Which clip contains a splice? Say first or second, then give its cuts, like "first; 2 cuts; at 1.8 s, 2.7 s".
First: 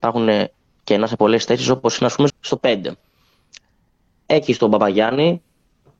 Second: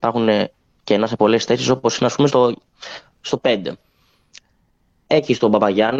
first; 1 cut; at 2.3 s